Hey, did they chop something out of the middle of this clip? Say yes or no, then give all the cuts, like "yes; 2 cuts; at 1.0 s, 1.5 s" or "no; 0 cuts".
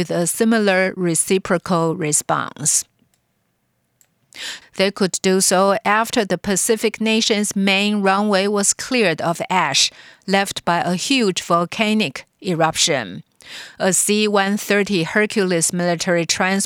yes; 1 cut; at 4.6 s